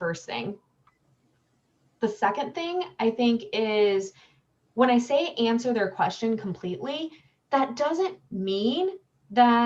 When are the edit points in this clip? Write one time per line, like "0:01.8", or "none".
none